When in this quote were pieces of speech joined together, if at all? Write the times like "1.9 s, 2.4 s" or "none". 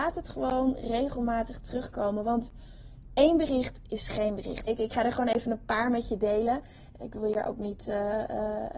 4.7 s